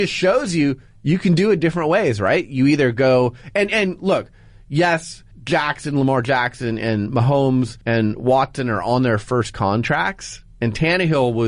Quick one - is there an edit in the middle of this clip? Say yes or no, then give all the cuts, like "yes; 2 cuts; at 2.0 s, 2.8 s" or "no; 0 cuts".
yes; 2 cuts; at 5.3 s, 7.8 s